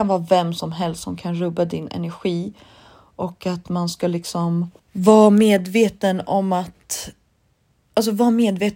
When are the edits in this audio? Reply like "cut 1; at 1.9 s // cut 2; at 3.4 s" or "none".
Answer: cut 1; at 4.8 s